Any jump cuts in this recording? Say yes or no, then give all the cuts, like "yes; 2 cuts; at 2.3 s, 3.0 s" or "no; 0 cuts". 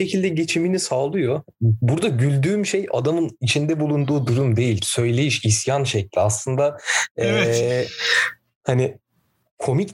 no; 0 cuts